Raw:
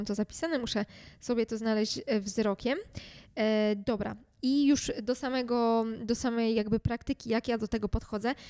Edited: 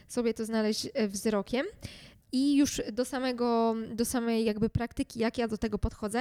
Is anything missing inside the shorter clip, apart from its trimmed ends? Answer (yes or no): yes